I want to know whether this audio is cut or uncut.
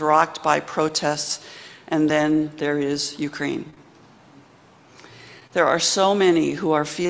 uncut